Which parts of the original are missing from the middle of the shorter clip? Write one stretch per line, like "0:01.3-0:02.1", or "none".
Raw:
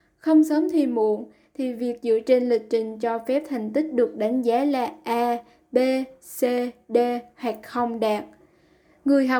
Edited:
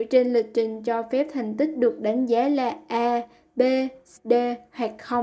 0:06.3-0:06.8